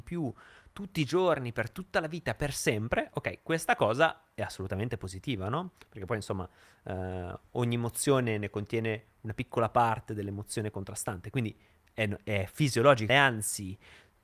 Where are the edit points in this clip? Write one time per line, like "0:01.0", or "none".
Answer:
0:13.1